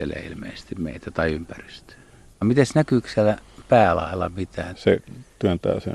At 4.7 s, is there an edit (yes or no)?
yes